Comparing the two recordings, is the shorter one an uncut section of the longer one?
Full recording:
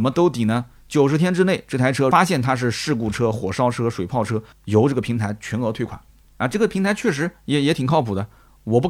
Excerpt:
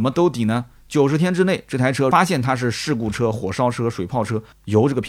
yes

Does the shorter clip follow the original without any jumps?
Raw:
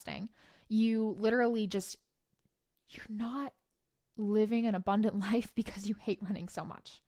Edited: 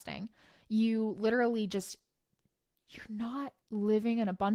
no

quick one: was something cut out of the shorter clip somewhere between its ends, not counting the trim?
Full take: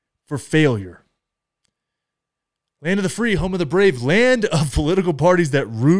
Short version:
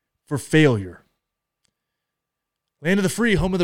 no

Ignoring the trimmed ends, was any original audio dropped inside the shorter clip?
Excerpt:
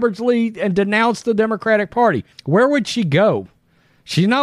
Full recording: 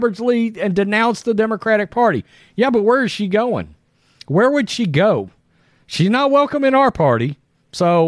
yes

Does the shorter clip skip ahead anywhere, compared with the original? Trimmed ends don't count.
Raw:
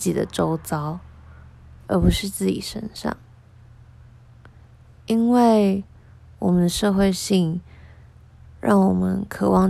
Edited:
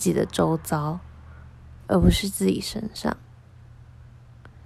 no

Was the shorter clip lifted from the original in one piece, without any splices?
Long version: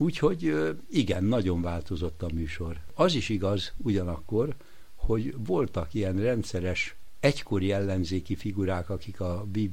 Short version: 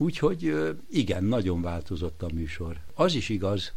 yes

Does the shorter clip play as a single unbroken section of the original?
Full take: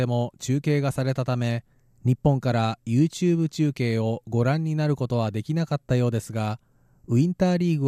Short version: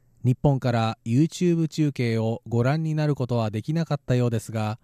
yes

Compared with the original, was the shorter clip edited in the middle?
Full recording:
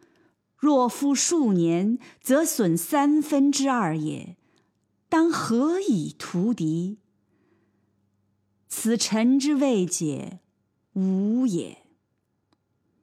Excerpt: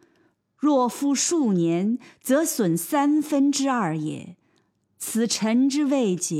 yes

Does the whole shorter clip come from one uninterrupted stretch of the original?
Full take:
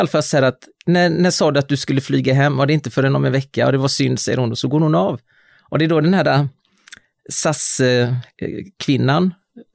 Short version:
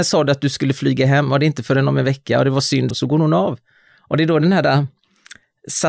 no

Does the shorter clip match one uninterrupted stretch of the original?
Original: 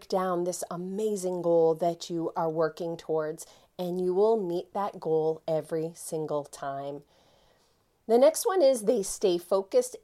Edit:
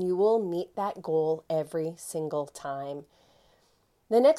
yes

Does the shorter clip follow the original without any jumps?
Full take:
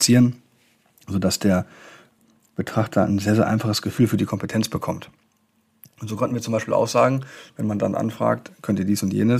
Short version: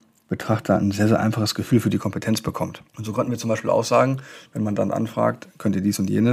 no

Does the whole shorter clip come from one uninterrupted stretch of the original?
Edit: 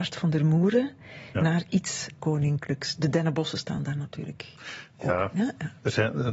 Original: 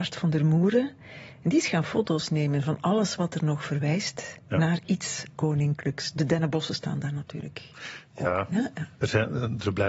no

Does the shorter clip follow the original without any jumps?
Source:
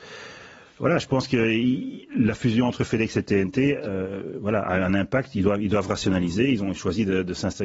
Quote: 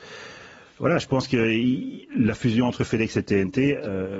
yes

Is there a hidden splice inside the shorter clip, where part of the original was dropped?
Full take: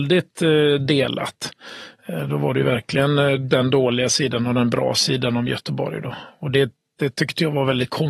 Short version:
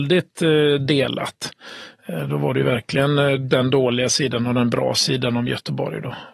no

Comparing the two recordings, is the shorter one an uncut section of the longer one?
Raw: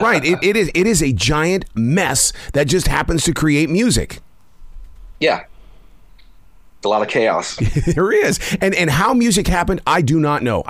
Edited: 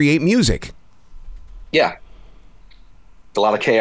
yes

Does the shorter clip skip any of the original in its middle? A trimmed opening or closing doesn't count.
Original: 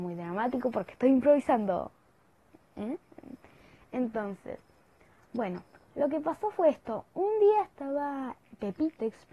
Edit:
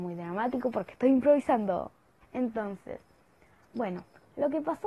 yes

